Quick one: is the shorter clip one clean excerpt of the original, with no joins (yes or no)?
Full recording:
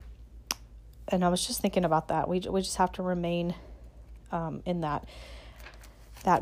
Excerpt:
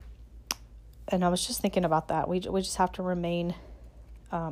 yes